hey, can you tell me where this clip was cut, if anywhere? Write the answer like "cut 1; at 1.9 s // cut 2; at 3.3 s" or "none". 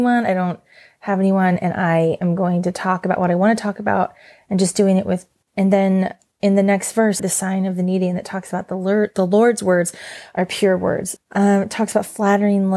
cut 1; at 5.4 s // cut 2; at 7.2 s // cut 3; at 11.2 s